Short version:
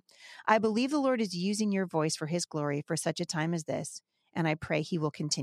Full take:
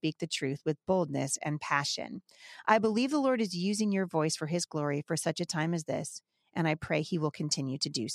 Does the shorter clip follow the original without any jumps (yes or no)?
yes